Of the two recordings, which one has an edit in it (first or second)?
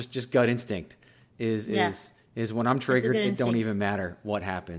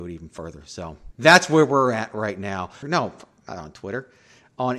second